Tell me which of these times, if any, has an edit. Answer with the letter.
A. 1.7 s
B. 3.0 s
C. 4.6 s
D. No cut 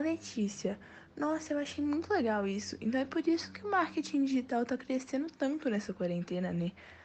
D